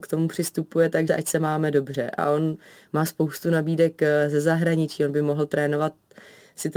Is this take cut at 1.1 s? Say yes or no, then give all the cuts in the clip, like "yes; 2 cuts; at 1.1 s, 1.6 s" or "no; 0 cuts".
yes; 1 cut; at 1.1 s